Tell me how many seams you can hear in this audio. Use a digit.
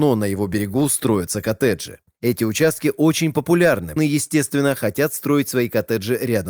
1